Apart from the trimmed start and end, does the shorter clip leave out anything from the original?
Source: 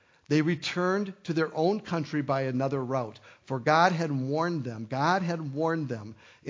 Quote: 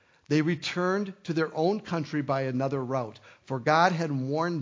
no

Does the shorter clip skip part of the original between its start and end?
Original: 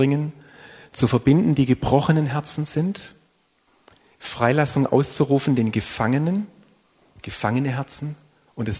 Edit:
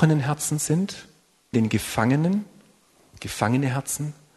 yes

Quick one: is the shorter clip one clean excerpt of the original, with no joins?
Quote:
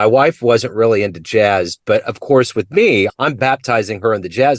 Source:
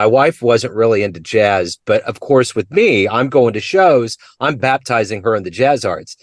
no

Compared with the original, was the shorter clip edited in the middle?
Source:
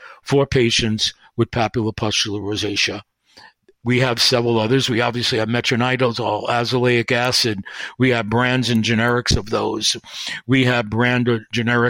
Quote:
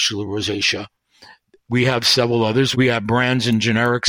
yes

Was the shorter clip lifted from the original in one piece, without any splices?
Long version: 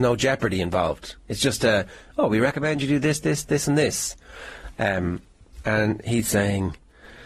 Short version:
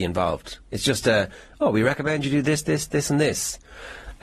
yes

